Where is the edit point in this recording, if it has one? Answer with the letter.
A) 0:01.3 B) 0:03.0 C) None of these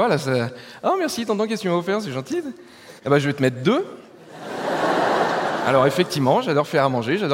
B